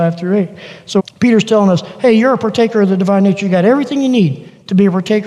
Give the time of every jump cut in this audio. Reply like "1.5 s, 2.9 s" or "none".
1.0 s